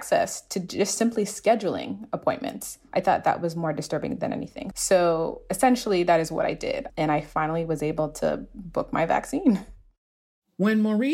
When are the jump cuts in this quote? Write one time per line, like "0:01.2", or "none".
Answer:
0:04.7
0:06.9